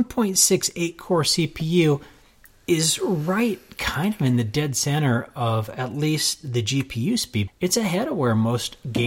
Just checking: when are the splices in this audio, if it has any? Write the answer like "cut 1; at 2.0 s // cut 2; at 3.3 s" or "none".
cut 1; at 7.5 s